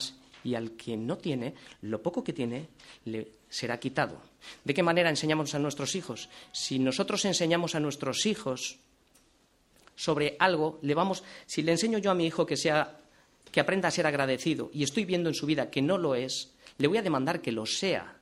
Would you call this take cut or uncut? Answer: uncut